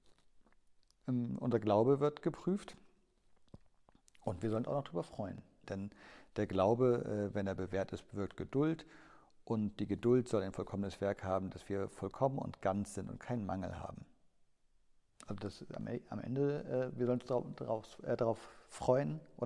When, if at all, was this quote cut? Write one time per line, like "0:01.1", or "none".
0:05.6